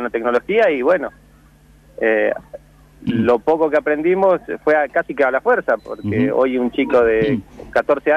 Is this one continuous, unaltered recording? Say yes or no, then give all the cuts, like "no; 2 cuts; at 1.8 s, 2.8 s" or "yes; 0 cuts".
no; 1 cut; at 5.8 s